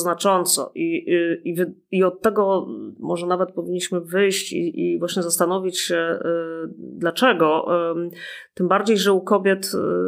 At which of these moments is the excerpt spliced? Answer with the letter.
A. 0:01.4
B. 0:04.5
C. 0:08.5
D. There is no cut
D